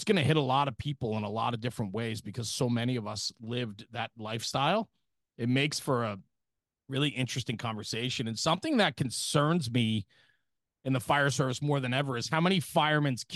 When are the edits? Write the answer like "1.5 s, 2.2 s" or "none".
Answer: none